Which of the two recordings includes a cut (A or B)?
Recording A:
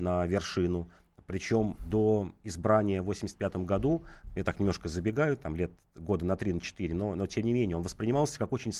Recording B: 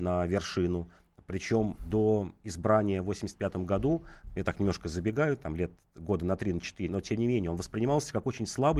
B